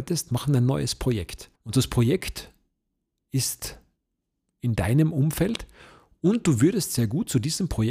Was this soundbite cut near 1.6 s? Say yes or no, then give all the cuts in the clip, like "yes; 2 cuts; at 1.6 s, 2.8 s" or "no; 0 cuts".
yes; 1 cut; at 1.6 s